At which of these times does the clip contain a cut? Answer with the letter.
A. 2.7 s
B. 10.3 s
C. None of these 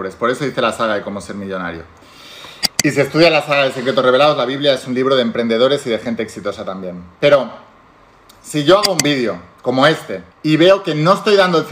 B